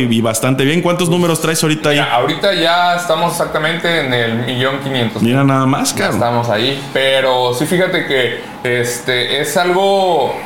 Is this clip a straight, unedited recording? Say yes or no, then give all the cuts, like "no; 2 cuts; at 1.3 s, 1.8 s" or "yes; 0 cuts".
yes; 0 cuts